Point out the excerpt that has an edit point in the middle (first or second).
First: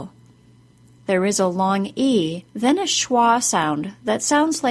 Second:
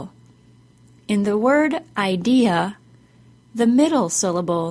first